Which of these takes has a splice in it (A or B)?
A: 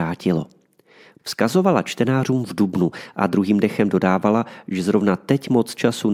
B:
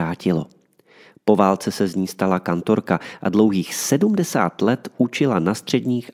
A